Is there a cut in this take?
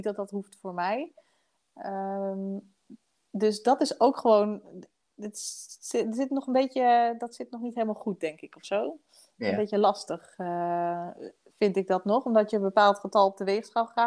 no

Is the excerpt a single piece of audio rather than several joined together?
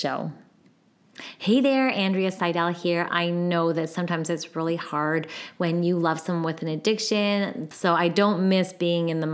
no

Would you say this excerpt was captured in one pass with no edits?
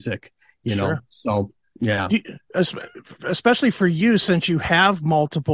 yes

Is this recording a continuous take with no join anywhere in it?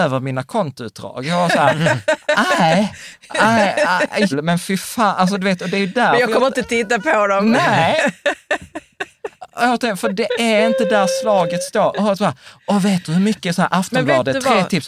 no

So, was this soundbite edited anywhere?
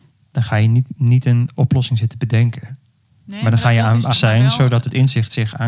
yes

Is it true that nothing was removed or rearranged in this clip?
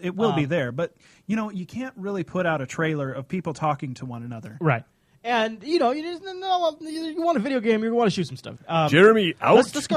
no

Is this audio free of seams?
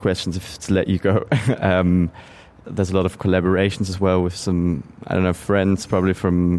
yes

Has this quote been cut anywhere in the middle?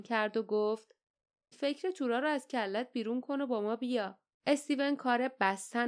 yes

